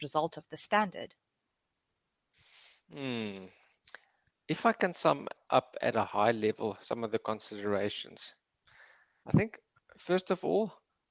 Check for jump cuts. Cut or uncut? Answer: uncut